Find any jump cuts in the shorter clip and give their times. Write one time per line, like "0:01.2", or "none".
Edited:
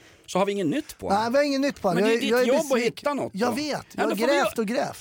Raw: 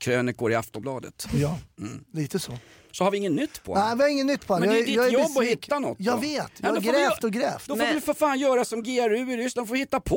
none